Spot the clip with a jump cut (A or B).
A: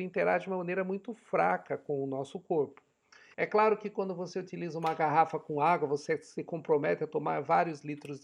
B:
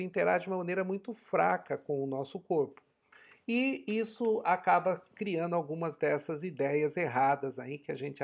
A